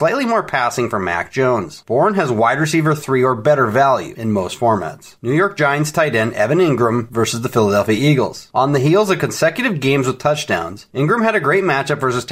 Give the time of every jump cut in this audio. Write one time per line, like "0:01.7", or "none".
none